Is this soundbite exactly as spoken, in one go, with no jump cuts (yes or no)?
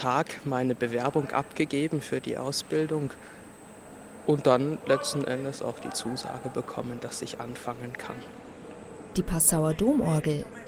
yes